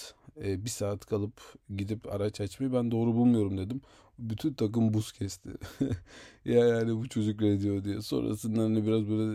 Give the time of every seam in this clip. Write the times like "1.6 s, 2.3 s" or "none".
none